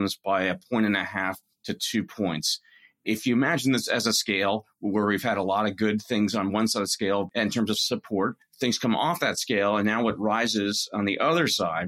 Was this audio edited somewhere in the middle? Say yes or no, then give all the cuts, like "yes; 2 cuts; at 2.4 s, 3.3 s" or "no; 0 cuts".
no; 0 cuts